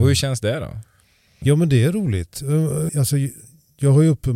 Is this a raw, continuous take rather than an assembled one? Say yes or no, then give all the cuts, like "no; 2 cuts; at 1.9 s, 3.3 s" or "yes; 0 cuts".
no; 1 cut; at 2.9 s